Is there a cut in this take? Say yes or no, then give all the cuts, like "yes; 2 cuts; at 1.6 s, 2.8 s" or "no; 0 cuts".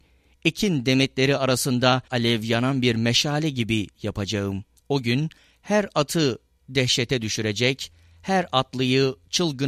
yes; 2 cuts; at 2.1 s, 4.8 s